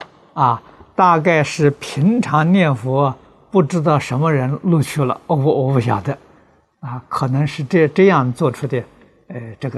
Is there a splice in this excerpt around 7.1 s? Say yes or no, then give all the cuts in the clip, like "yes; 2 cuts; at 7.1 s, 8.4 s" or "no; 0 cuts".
no; 0 cuts